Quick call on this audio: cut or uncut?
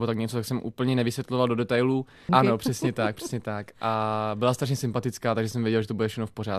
cut